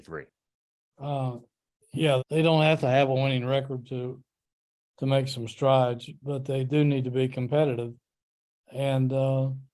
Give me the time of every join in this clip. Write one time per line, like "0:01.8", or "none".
0:00.9
0:02.2